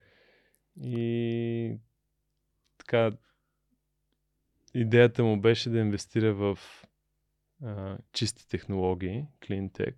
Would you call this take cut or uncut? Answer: cut